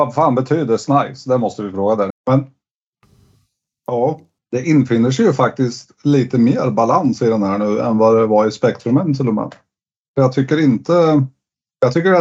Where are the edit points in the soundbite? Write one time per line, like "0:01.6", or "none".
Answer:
0:02.1